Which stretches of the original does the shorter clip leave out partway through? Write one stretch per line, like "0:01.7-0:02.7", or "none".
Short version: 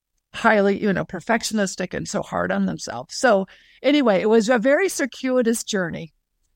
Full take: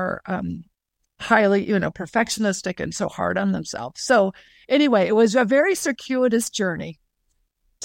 none